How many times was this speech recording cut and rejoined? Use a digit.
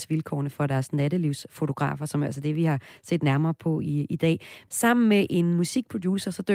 1